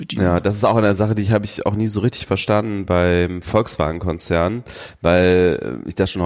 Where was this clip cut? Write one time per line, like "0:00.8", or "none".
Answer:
none